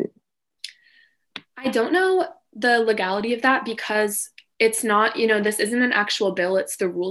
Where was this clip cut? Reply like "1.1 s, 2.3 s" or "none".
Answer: none